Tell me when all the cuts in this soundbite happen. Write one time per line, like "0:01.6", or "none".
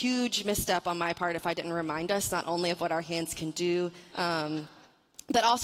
0:04.1